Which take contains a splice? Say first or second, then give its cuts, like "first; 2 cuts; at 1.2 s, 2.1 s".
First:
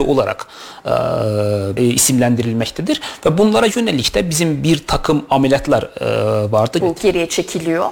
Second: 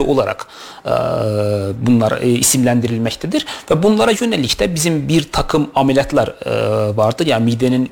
first; 2 cuts; at 1.8 s, 6.8 s